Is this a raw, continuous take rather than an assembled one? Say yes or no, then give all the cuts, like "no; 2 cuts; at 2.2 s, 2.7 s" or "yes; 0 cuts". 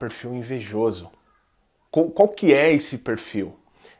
no; 1 cut; at 1.9 s